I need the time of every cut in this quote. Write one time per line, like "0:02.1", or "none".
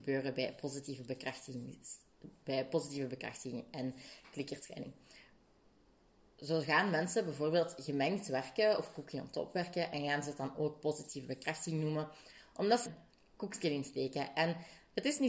0:12.9